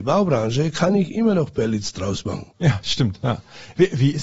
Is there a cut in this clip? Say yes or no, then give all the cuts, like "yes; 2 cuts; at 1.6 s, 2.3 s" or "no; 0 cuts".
yes; 1 cut; at 2.5 s